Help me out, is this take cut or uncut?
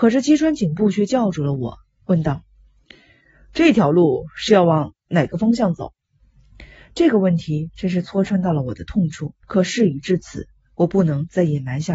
cut